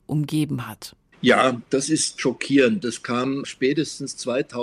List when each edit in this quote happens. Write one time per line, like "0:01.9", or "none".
none